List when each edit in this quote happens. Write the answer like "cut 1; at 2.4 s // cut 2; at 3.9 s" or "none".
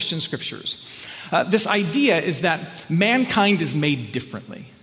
none